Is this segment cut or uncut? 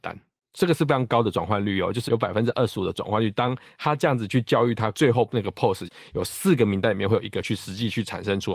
cut